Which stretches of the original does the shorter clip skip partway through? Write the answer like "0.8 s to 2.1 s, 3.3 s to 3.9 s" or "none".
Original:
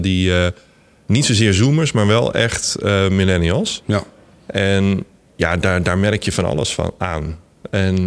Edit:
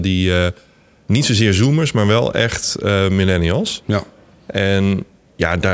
none